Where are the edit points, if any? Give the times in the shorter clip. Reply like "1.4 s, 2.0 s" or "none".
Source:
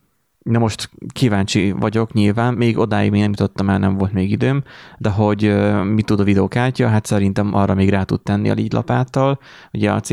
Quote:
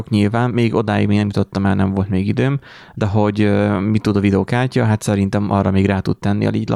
none